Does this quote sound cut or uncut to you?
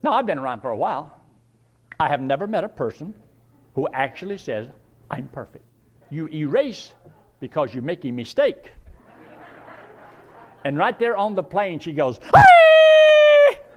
cut